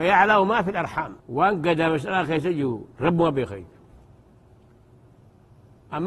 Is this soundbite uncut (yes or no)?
no